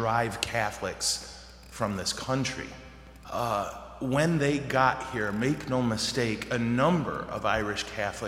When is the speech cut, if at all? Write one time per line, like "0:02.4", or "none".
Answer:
0:03.2